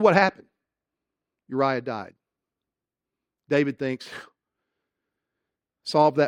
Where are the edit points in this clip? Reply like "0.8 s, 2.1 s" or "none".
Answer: none